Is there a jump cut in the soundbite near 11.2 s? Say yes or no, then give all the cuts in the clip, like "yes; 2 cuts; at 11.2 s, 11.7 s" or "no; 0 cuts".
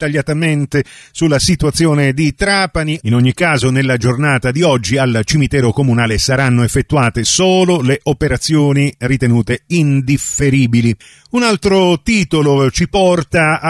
no; 1 cut; at 3.0 s